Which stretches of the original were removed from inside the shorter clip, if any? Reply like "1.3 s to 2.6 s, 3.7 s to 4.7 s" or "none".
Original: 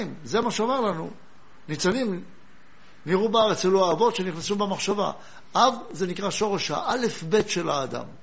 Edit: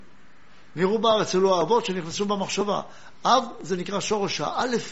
none